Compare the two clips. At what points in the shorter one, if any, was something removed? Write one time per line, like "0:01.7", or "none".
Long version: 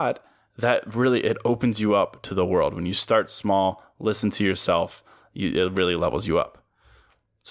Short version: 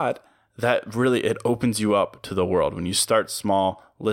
none